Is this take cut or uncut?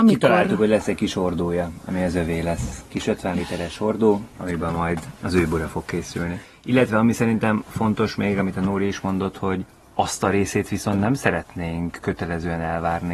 uncut